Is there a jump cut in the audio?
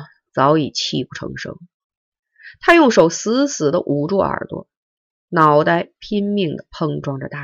no; 0 cuts

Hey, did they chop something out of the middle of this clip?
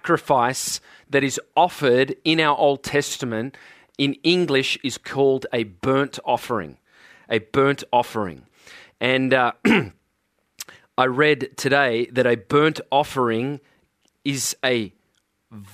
no; 0 cuts

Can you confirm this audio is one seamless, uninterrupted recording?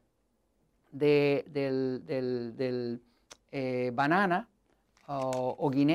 yes; 0 cuts

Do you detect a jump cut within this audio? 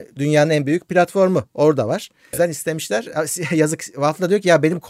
yes; 1 cut; at 2.3 s

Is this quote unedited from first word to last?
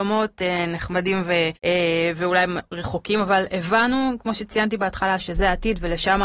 no; 1 cut; at 1.6 s

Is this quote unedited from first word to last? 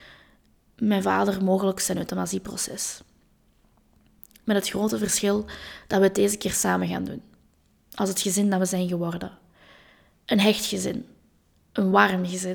yes; 0 cuts

